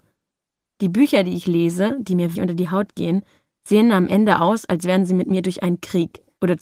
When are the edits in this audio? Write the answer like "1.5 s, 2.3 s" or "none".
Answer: 2.3 s

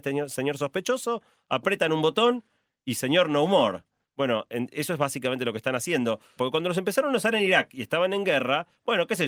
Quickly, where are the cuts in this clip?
4.0 s, 6.4 s

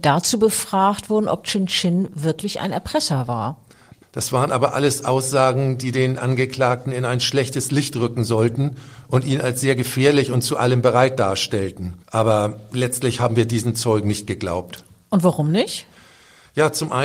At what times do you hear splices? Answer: 4.0 s, 12.0 s

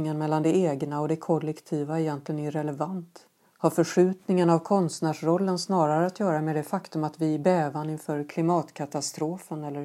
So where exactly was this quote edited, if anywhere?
none

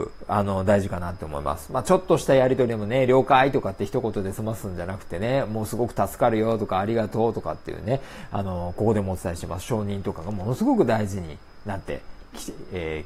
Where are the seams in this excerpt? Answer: none

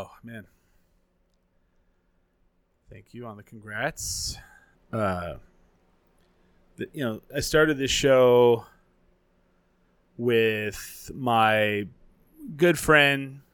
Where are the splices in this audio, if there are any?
4.8 s

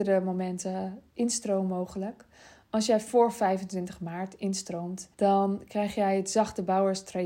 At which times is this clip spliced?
5.1 s

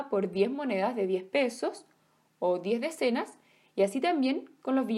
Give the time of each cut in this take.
none

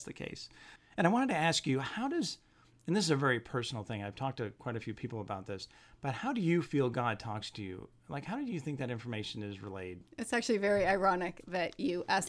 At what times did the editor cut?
none

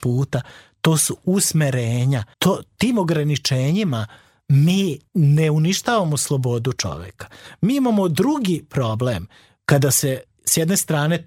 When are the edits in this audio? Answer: 2.3 s

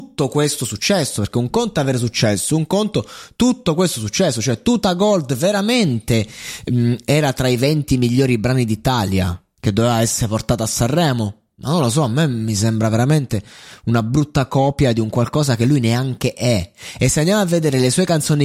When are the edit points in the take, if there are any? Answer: none

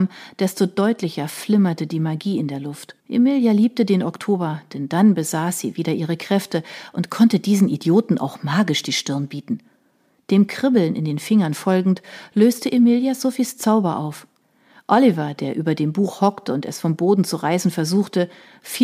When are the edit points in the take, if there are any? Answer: 3.0 s

